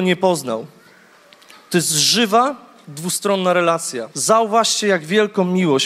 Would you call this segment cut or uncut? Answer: cut